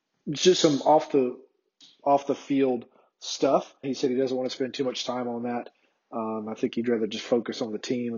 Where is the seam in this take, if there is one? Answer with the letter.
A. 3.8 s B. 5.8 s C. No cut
A